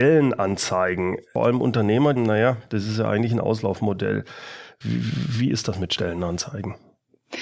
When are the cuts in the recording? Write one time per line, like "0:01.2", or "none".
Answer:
0:02.2
0:04.8